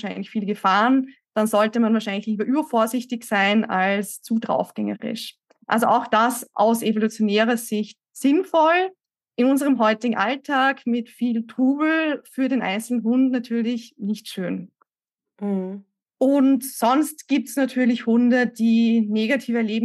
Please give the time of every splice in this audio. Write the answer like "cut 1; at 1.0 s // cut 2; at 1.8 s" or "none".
none